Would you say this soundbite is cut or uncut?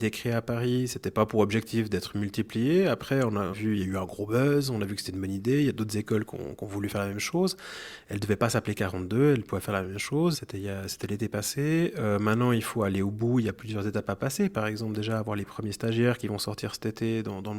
cut